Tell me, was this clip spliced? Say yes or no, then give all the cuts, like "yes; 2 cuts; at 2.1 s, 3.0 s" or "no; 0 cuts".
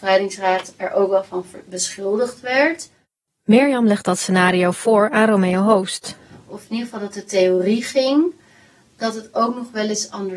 no; 0 cuts